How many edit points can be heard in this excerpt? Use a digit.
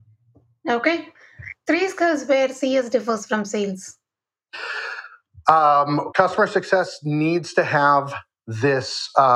1